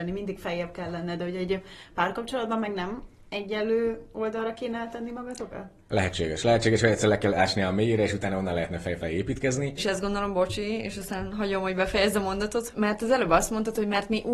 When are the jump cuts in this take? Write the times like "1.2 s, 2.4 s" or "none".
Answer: 5.9 s, 9.8 s, 12.7 s